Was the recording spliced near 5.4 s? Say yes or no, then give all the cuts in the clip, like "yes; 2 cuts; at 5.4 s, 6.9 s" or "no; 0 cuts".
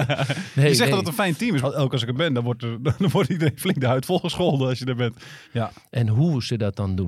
yes; 2 cuts; at 1.6 s, 5.4 s